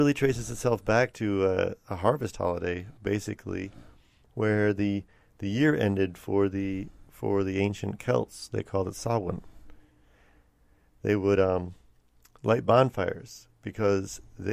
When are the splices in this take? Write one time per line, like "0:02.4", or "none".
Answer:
none